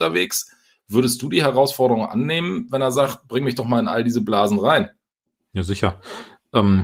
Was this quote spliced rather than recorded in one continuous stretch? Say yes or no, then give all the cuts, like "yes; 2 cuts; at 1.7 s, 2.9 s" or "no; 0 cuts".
no; 0 cuts